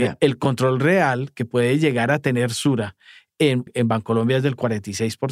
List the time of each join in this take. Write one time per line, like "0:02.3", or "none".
0:03.7